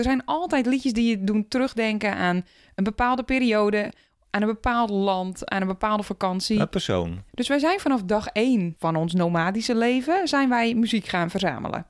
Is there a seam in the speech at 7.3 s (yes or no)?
yes